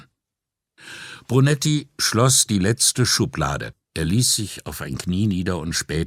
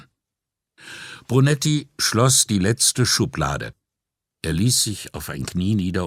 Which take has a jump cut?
first; 1 cut; at 3.8 s

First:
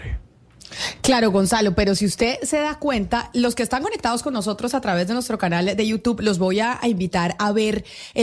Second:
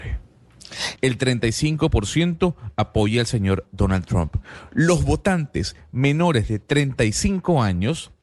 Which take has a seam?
second; 1 cut; at 1.0 s

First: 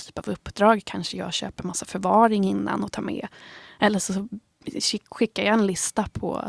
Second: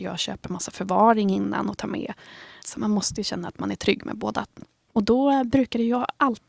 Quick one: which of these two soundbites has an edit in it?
second; 2 cuts; at 2.6 s, 4.9 s

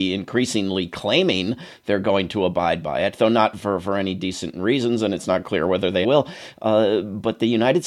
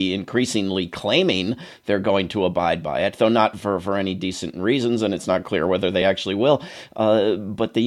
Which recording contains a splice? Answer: first; 1 cut; at 6.0 s

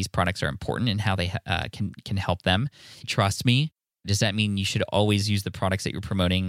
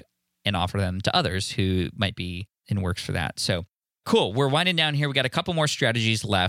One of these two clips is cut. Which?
first; 1 cut; at 3.0 s

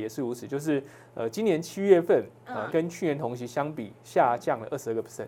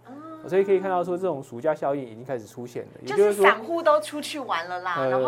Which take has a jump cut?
first; 1 cut; at 2.7 s

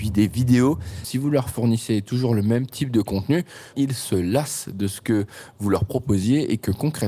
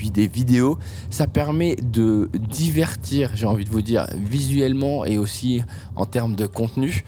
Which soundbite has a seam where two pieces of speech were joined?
first; 2 cuts; at 1.0 s, 3.7 s

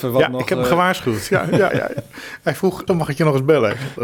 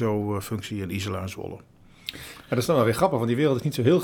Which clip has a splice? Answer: first; 2 cuts; at 1.7 s, 2.9 s

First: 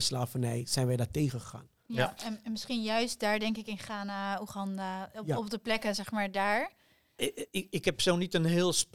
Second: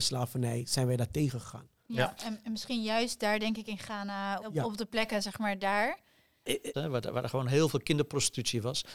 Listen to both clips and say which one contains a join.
second; 2 cuts; at 4.4 s, 6.7 s

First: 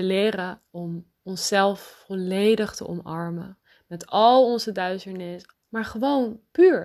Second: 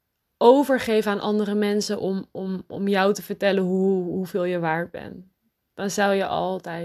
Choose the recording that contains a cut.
first; 2 cuts; at 1.2 s, 5.5 s

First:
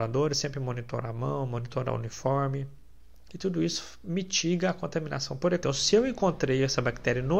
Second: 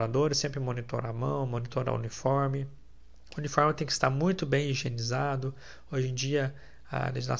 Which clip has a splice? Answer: first; 2 cuts; at 3.3 s, 5.6 s

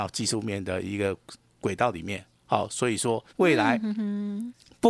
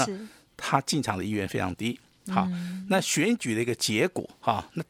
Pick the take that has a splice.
first; 1 cut; at 3.3 s

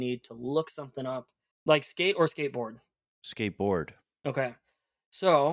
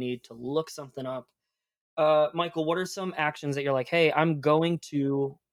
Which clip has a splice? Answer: first; 1 cut; at 1.5 s

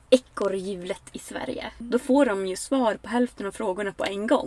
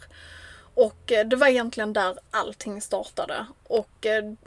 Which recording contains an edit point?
first; 1 cut; at 1.8 s

